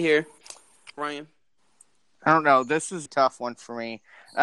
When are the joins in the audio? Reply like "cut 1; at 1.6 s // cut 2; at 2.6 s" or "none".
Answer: cut 1; at 1.0 s // cut 2; at 3.1 s